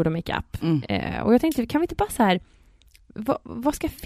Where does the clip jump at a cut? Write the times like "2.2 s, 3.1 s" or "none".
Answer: none